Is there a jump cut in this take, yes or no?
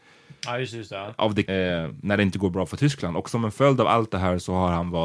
yes